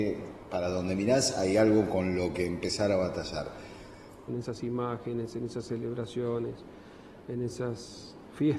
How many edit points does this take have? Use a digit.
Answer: 1